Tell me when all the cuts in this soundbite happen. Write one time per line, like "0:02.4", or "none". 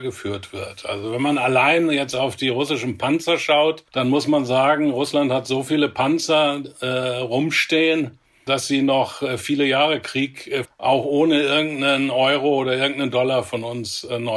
0:03.9
0:10.6